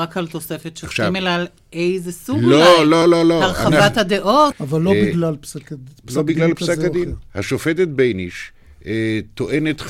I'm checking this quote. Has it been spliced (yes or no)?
yes